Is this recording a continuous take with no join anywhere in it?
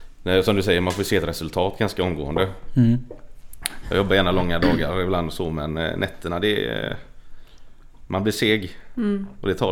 no; 1 cut; at 3.8 s

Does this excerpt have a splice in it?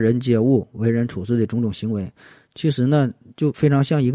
no; 0 cuts

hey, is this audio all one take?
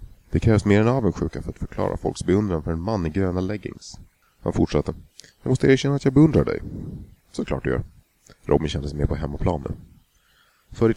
no; 1 cut; at 4.2 s

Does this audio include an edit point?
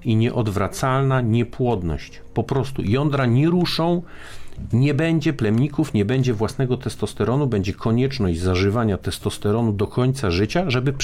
no; 0 cuts

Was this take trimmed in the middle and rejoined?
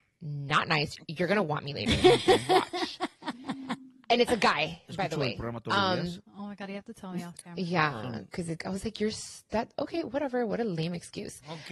yes; 1 cut; at 8.6 s

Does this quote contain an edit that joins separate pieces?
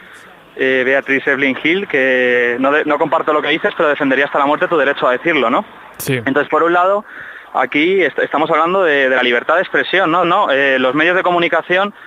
yes; 1 cut; at 10.2 s

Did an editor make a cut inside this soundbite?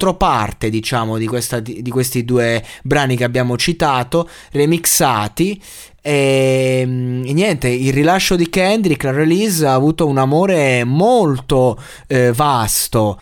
no; 0 cuts

